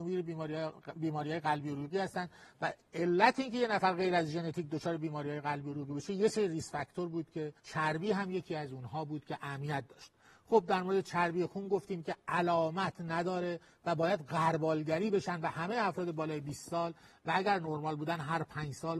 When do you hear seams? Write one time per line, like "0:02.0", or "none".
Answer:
0:07.6